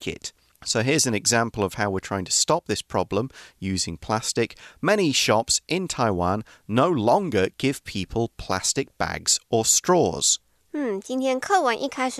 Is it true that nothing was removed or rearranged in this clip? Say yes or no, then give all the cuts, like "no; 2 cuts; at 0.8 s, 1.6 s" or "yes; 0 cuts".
yes; 0 cuts